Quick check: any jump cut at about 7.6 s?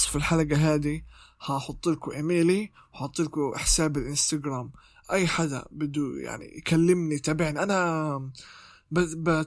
yes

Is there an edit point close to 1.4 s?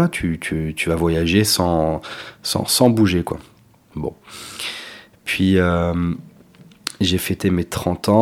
no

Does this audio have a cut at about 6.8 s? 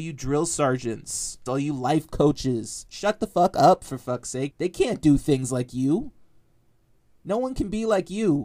no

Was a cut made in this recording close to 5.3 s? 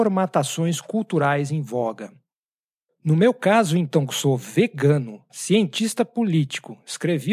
yes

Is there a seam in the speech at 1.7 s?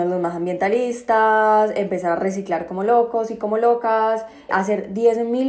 no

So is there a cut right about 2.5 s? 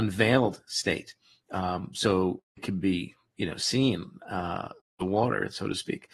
yes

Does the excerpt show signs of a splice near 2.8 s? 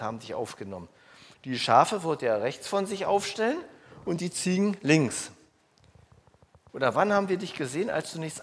no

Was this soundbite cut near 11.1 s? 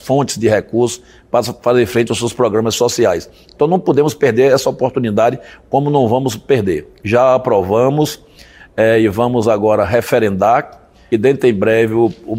yes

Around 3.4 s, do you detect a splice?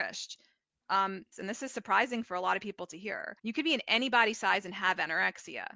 yes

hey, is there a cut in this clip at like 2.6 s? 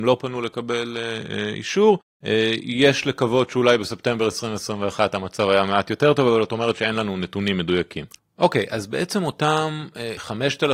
no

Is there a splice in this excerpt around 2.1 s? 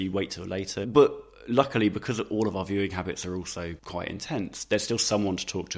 no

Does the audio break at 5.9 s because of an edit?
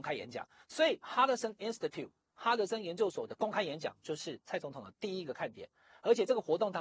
no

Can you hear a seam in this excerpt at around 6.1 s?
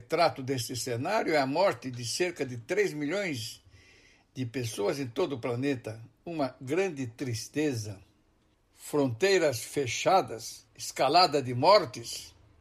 no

